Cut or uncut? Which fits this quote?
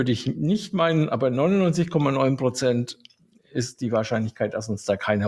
uncut